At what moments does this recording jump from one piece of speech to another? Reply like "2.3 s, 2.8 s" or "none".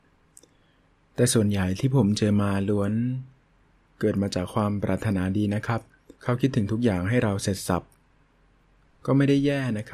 6.2 s